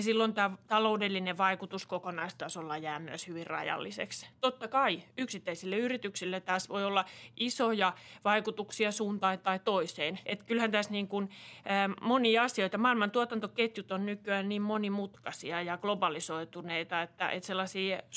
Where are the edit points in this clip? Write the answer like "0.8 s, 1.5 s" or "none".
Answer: 10.2 s